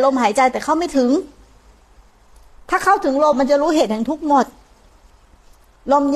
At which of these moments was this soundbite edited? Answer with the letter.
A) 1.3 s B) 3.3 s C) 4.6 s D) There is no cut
B